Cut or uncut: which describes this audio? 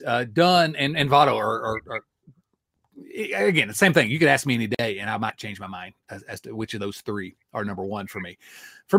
uncut